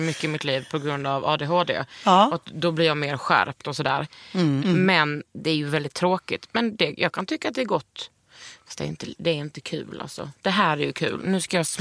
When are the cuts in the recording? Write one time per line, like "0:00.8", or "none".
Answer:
0:04.6